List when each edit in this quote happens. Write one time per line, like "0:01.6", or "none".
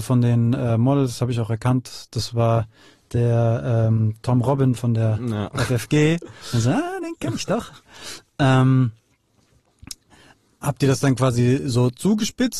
none